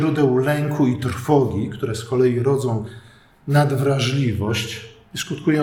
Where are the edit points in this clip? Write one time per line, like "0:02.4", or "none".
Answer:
none